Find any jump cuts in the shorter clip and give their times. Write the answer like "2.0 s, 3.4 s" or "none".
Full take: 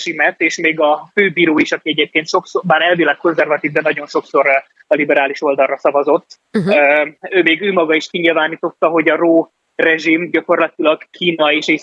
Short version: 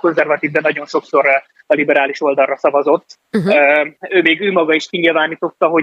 none